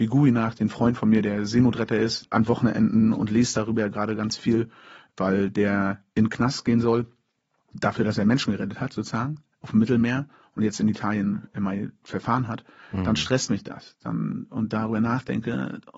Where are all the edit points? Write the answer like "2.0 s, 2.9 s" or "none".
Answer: none